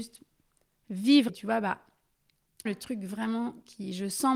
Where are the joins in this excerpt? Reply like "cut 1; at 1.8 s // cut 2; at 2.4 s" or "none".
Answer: cut 1; at 1.3 s // cut 2; at 2.6 s